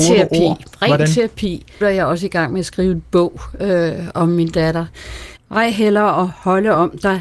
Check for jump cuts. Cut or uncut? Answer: cut